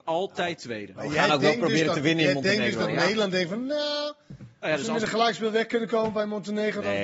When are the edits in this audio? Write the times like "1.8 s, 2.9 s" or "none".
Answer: none